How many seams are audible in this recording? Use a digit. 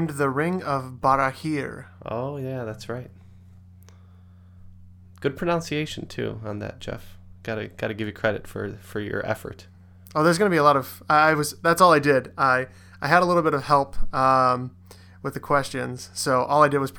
0